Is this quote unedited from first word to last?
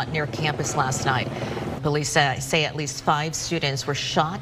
no; 1 cut; at 1.8 s

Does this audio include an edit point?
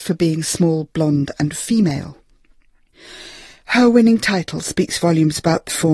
no; 0 cuts

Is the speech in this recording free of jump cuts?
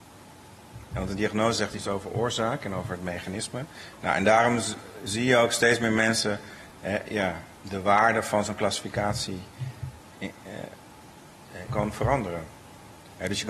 no; 2 cuts; at 10.1 s, 11.7 s

